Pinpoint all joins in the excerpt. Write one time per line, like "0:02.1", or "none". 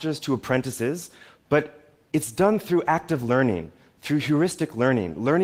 none